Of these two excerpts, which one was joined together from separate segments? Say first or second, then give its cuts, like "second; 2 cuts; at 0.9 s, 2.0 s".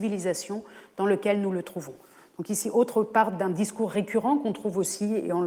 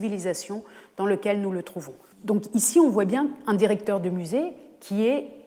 second; 1 cut; at 2.1 s